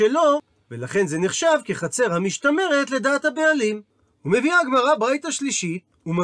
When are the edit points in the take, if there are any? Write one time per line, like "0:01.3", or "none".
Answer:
none